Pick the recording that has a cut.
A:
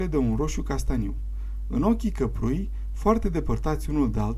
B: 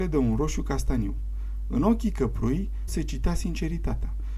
B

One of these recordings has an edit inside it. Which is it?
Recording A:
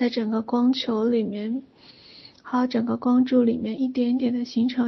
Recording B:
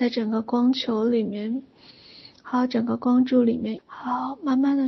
B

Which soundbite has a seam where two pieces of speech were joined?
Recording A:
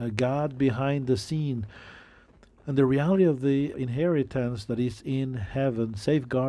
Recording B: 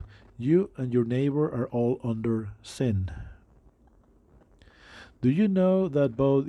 A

